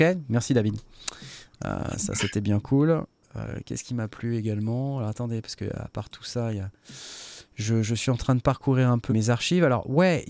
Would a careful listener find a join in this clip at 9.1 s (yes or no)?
yes